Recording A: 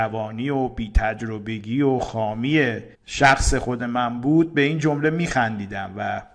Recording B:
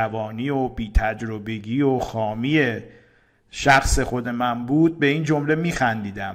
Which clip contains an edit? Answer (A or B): A